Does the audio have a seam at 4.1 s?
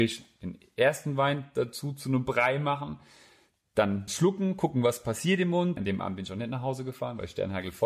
yes; 2 cuts; at 4.1 s, 5.8 s

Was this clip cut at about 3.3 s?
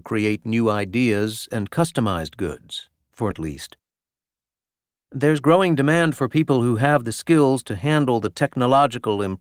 yes; 1 cut; at 3.3 s

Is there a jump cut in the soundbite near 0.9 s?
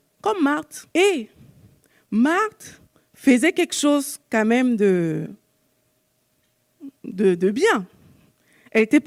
yes; 1 cut; at 0.9 s

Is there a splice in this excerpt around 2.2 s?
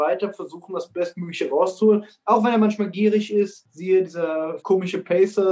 no; 1 cut; at 4.6 s

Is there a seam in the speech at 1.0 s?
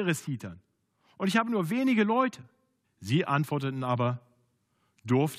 no; 1 cut; at 2.8 s

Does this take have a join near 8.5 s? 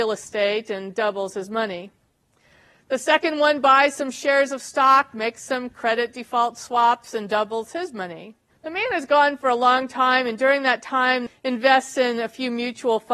yes; 2 cuts; at 8.5 s, 11.3 s

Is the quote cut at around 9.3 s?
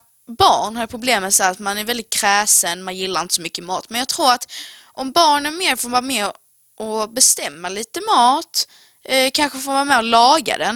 no; 0 cuts

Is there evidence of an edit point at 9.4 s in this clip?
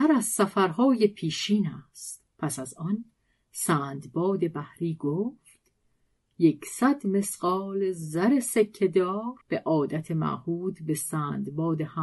yes; 2 cuts; at 2.3 s, 9.4 s

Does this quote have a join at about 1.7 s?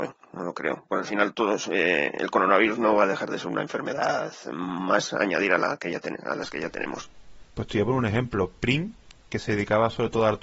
no; 0 cuts

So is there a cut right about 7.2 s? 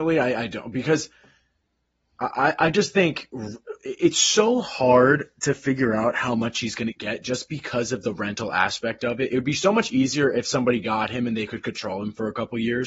no; 0 cuts

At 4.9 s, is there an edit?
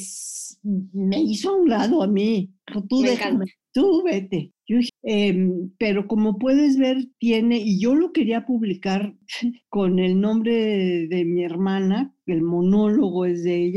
yes; 1 cut; at 4.9 s

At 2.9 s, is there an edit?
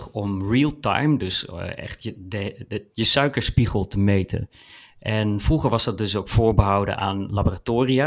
yes; 1 cut; at 2.9 s

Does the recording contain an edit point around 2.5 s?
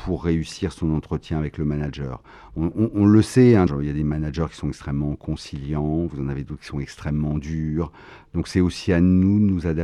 yes; 2 cuts; at 2.5 s, 3.7 s

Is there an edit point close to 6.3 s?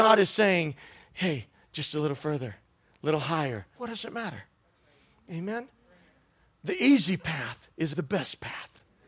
no; 2 cuts; at 3.8 s, 7.9 s

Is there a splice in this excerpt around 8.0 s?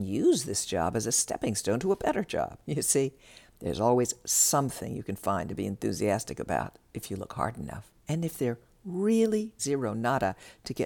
yes; 3 cuts; at 2.6 s, 8.0 s, 9.6 s

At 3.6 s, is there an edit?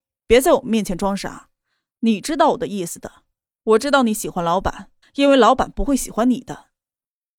no; 1 cut; at 5.0 s

